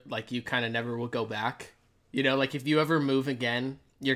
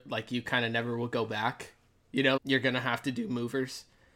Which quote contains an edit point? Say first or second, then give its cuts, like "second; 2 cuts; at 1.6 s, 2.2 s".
second; 1 cut; at 2.4 s